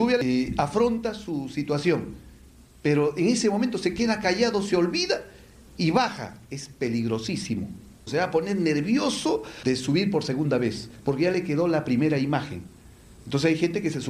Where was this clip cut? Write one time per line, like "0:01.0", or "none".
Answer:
none